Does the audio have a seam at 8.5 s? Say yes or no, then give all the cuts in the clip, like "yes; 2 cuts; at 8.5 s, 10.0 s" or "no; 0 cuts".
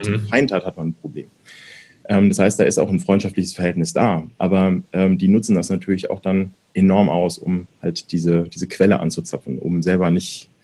no; 0 cuts